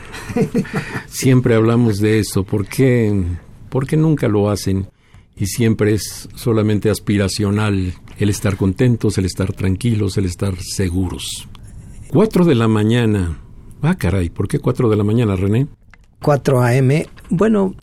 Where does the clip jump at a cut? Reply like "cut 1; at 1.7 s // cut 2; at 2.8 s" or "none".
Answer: none